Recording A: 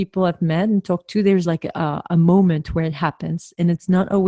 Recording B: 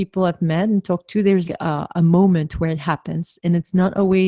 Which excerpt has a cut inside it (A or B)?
B